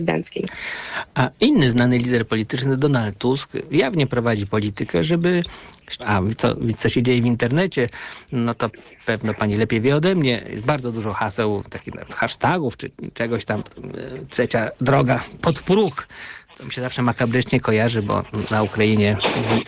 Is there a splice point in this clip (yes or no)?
yes